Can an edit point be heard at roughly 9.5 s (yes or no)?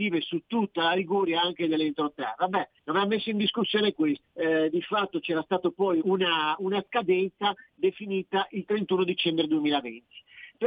no